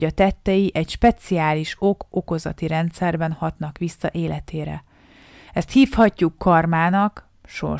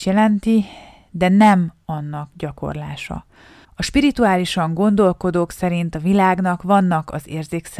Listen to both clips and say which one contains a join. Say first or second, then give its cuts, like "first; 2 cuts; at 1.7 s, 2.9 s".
second; 1 cut; at 3.6 s